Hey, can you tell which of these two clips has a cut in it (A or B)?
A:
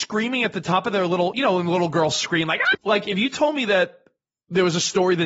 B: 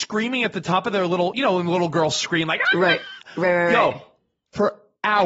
A